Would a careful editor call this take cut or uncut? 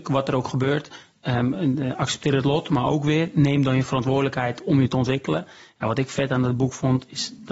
uncut